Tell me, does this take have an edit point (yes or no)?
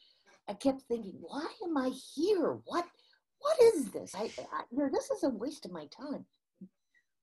no